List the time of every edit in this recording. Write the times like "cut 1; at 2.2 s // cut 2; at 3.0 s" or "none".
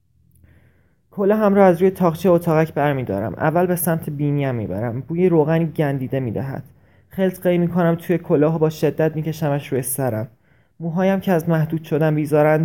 none